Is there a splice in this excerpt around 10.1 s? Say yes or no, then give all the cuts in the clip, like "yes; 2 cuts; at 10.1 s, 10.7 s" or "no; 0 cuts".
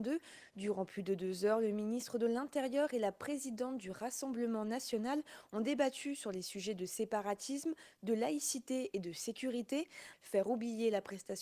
yes; 1 cut; at 10.1 s